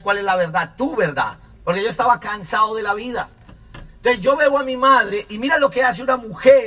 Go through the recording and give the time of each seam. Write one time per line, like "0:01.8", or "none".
0:01.5

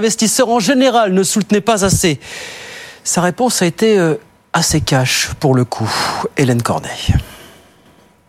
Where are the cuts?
none

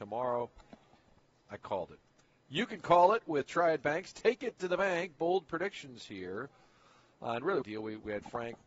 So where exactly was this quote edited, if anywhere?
0:01.3
0:07.6

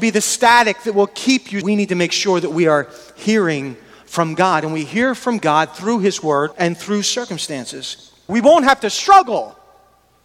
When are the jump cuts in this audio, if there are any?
0:01.6
0:06.5
0:08.3

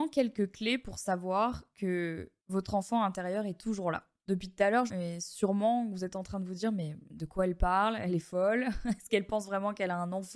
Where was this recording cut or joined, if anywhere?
0:04.9

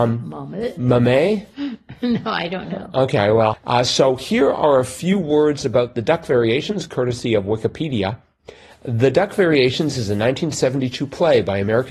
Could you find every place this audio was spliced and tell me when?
0:03.5

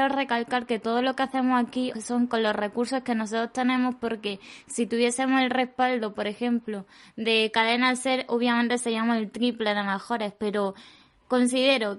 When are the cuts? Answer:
0:01.9

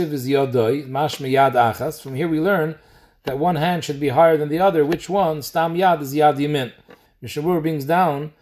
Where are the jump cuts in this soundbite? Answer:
0:07.1

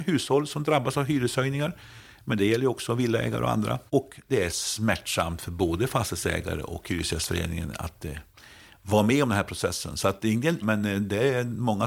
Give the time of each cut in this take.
0:03.9
0:10.6

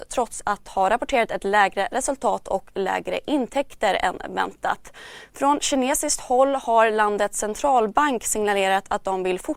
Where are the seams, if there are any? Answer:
0:05.3

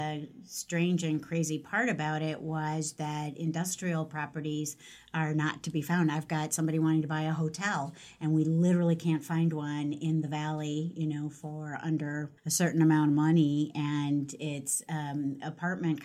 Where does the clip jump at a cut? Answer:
0:12.4

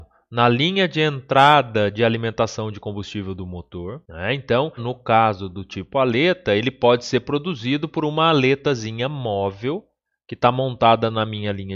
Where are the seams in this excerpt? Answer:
0:04.8

